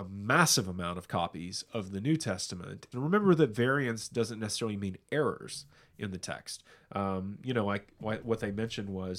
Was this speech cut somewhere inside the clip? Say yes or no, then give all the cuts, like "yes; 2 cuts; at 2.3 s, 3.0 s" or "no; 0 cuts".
yes; 1 cut; at 2.9 s